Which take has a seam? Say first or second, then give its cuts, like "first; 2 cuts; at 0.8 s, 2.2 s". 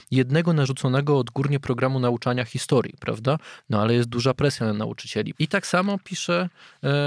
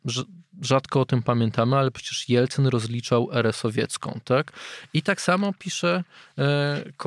first; 1 cut; at 5.3 s